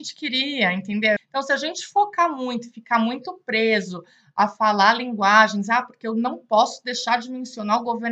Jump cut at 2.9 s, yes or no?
no